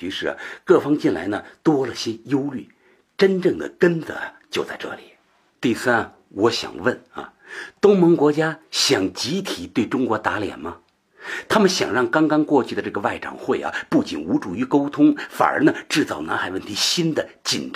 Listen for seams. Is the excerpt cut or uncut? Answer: uncut